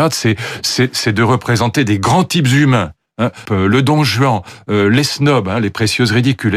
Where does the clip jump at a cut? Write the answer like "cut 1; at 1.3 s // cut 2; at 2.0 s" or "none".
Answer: cut 1; at 3.5 s

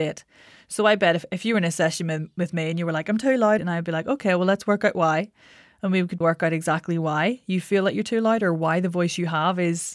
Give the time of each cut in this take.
cut 1; at 3.6 s // cut 2; at 6.2 s

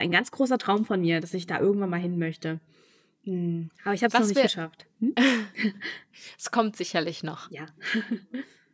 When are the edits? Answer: none

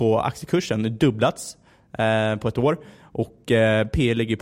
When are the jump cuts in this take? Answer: none

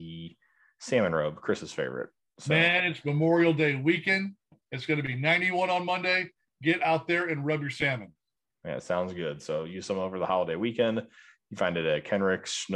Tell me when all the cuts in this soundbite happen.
none

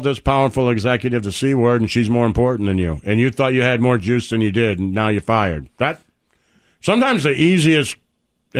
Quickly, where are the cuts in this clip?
none

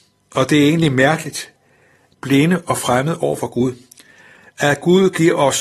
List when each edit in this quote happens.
cut 1; at 2.1 s

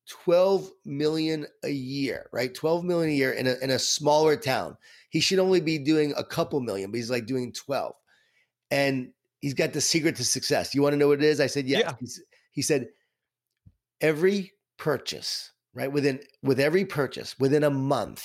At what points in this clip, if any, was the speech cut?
none

